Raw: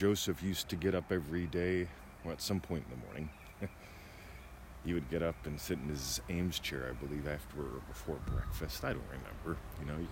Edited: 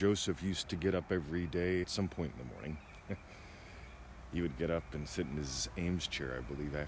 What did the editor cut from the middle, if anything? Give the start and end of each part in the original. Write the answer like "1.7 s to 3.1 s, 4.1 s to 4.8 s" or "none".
1.8 s to 2.4 s